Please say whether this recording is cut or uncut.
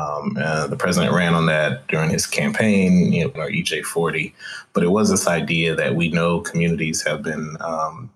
cut